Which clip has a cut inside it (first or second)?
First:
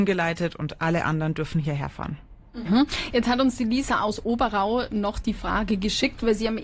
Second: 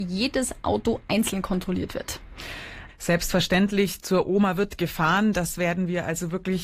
second